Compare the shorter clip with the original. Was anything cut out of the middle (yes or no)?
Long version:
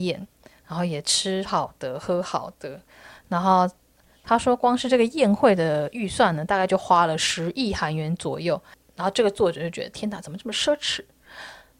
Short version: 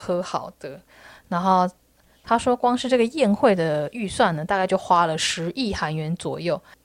no